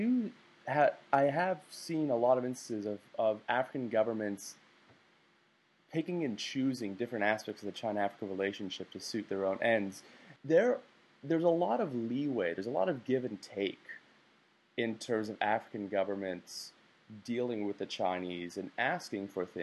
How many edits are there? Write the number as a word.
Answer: one